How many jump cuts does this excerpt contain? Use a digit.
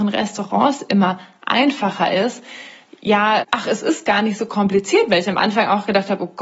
1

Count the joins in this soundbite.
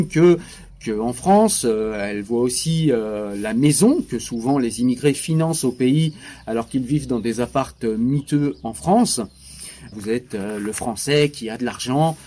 1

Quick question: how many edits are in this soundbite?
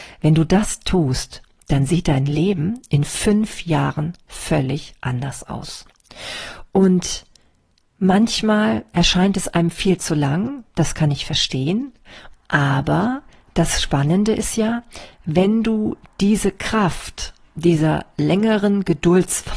1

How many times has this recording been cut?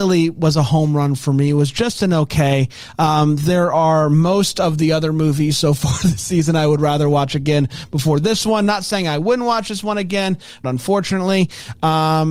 1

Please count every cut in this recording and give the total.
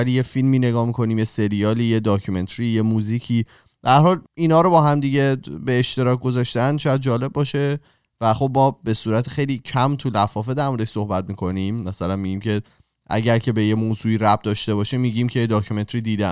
1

